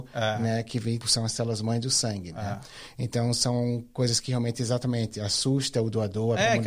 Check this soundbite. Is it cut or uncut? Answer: cut